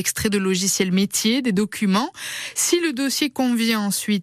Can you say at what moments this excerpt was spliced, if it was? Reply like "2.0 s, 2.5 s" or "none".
none